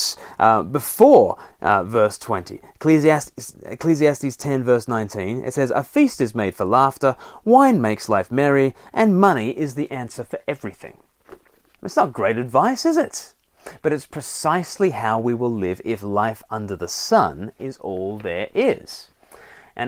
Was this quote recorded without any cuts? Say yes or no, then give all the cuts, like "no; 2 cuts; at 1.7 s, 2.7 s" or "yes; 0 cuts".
no; 1 cut; at 11.8 s